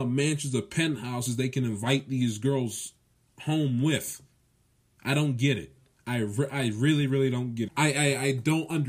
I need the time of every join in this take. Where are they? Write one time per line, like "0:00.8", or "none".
0:07.7